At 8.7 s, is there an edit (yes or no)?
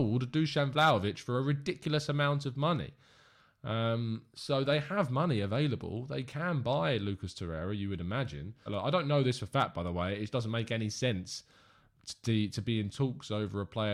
yes